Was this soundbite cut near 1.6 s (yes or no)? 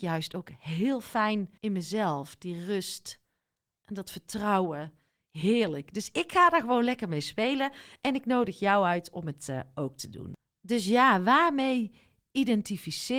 yes